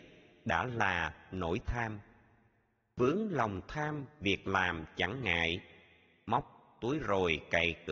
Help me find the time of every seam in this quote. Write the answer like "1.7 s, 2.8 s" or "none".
none